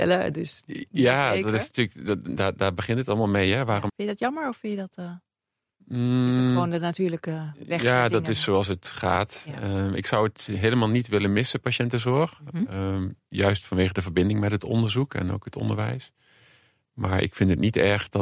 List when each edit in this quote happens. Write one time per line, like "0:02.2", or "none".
0:03.9